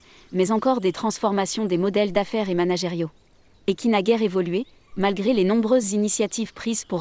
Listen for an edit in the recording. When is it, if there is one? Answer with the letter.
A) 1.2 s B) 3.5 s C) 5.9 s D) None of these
B